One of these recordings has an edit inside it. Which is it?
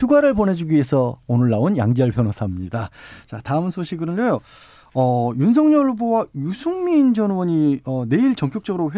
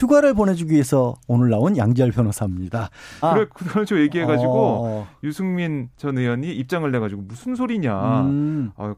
second; 1 cut; at 3.2 s

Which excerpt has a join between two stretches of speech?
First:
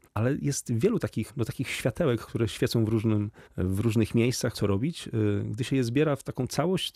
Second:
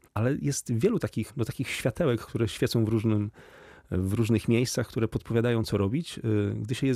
first; 2 cuts; at 3.5 s, 4.5 s

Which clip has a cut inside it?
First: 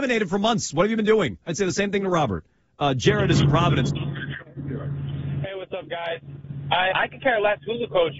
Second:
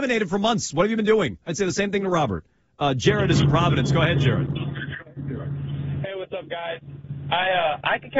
first; 2 cuts; at 3.9 s, 6.9 s

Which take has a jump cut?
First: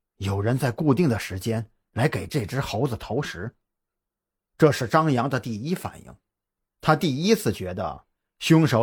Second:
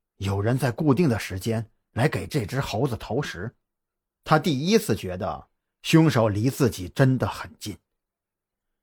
second; 1 cut; at 4.2 s

